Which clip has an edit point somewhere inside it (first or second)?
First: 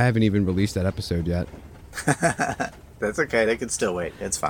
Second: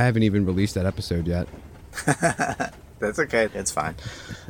second